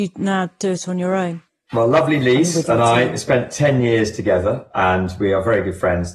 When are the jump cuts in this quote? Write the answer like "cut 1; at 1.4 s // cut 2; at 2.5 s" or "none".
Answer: none